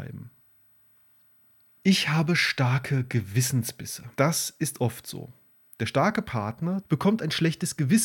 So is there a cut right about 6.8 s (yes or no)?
yes